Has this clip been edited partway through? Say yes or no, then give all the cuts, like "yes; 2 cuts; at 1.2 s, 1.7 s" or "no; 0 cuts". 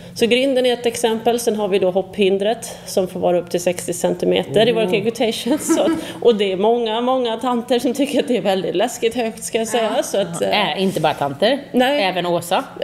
no; 0 cuts